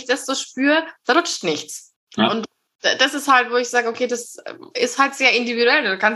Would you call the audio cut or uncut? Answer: cut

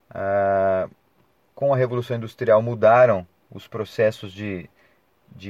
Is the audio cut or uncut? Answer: uncut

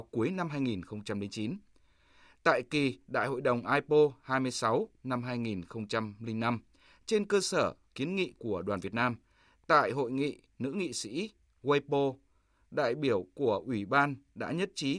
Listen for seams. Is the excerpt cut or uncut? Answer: uncut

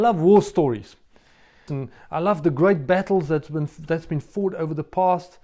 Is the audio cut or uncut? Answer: cut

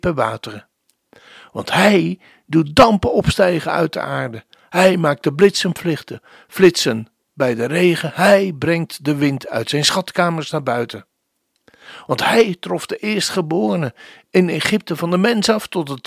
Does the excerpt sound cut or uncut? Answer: uncut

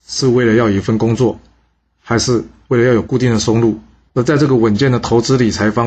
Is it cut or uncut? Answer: cut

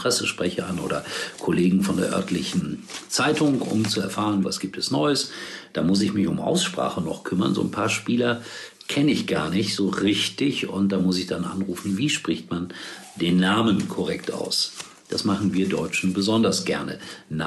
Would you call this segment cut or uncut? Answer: cut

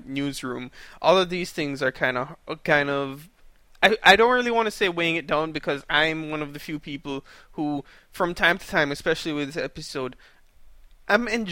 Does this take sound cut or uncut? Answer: uncut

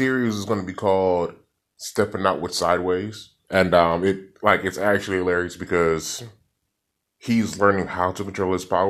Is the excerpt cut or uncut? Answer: cut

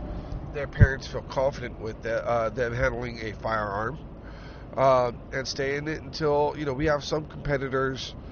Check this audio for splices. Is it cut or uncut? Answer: uncut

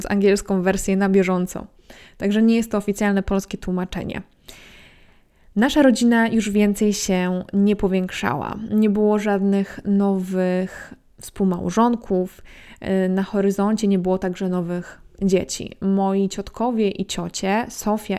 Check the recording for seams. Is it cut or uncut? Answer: uncut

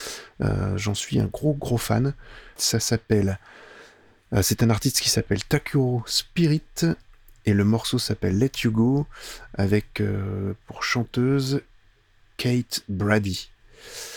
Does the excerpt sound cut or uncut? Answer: cut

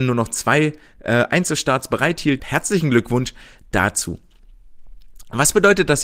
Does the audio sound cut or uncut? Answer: cut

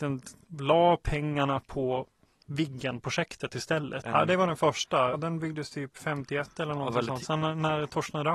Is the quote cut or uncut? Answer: cut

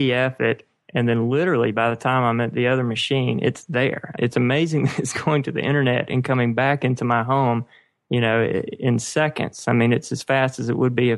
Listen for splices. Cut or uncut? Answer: cut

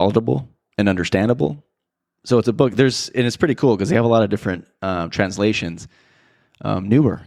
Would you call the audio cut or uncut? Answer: uncut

